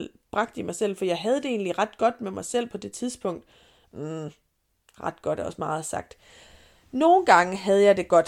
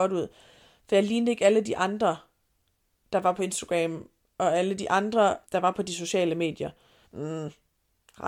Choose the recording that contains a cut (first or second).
second